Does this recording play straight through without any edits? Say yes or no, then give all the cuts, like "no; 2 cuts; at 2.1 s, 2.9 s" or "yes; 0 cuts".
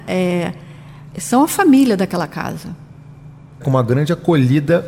no; 2 cuts; at 1.1 s, 3.6 s